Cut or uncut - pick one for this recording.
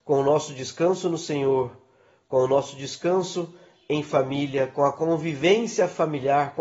uncut